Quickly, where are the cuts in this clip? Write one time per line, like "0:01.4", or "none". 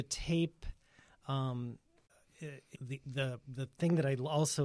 0:02.7